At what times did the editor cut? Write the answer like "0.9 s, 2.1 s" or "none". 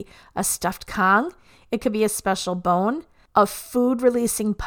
none